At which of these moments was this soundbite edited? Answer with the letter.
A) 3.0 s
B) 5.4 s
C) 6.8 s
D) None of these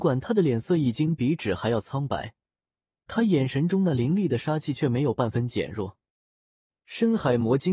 A